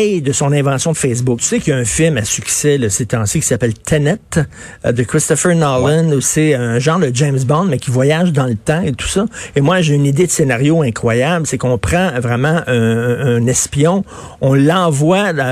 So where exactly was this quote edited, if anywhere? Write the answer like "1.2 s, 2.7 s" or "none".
1.4 s